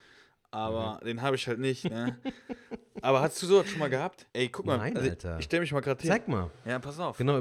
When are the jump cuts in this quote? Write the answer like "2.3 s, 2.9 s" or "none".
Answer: 4.3 s